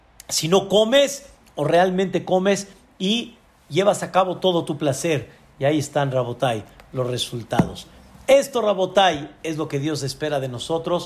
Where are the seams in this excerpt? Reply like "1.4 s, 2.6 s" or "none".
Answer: none